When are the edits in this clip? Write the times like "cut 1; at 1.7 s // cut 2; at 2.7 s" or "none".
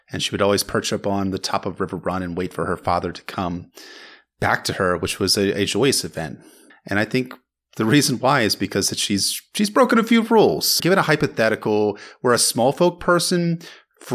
cut 1; at 6.7 s // cut 2; at 10.8 s